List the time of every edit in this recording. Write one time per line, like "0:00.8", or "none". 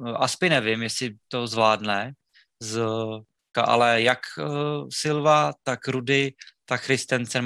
0:03.5